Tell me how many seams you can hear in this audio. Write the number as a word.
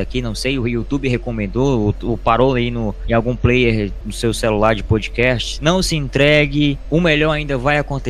two